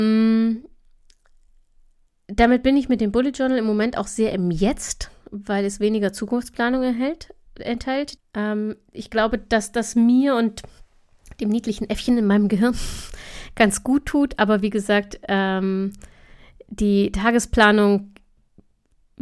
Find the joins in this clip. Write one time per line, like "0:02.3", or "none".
0:08.2

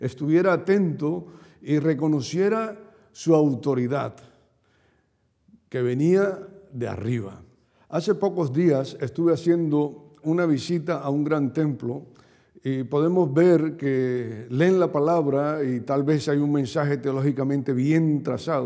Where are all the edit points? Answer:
0:10.2

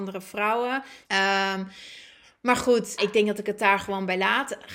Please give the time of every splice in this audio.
0:01.0
0:03.0

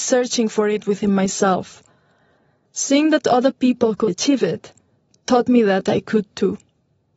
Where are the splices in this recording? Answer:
0:04.1

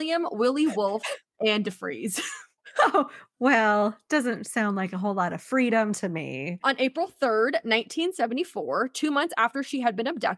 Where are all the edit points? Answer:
none

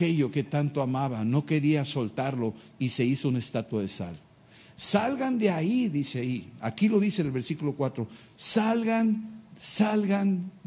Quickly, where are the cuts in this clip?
none

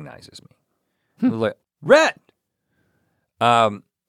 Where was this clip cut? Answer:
0:01.6

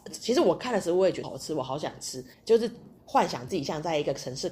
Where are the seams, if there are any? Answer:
0:01.2
0:02.3

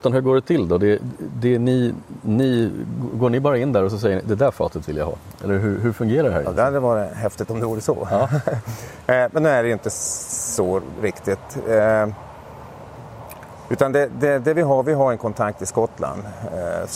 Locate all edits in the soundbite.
none

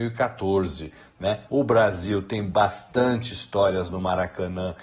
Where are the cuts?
0:01.5

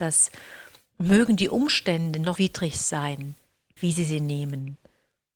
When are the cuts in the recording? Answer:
0:02.4
0:03.8

